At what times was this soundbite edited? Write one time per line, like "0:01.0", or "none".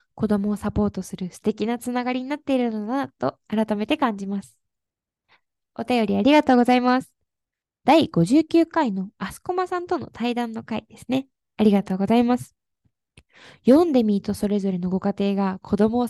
none

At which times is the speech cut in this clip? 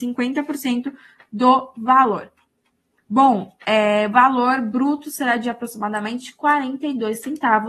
0:03.0

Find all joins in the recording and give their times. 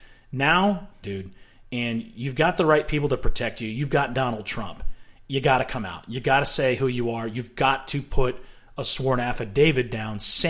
0:01.0

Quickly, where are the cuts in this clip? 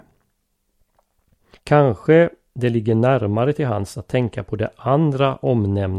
0:01.6

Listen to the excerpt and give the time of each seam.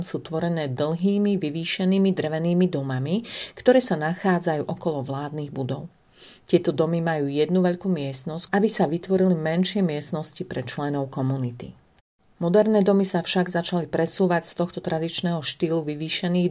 0:08.5

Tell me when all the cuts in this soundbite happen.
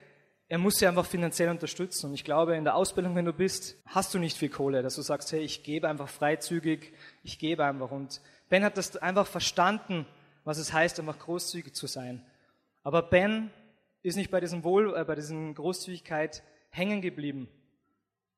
0:03.8

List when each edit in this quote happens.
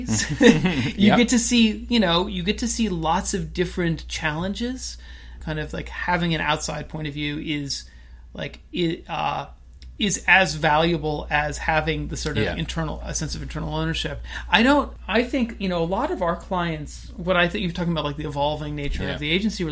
0:05.4

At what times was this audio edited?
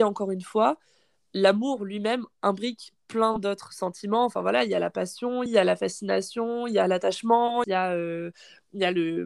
0:05.5
0:07.6

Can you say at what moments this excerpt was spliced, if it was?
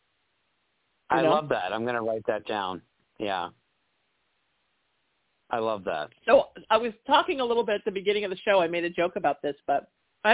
none

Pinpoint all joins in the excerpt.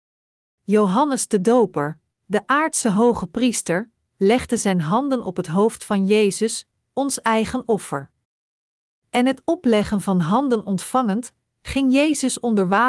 none

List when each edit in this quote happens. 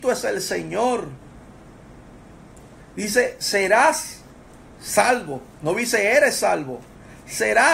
none

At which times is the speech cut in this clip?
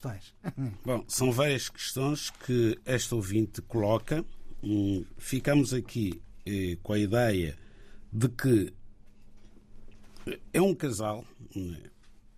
none

